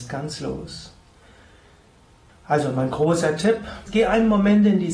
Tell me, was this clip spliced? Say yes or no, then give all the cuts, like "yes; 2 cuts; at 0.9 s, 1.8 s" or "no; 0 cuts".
yes; 2 cuts; at 2.3 s, 3.9 s